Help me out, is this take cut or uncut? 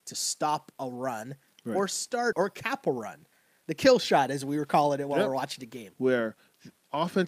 cut